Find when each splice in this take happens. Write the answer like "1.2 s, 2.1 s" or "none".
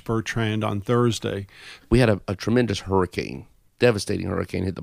1.8 s